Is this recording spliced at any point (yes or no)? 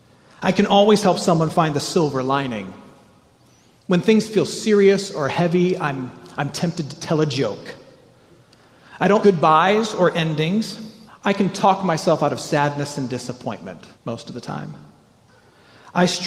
yes